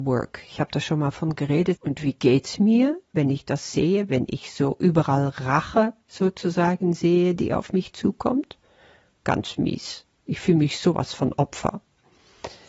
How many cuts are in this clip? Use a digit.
2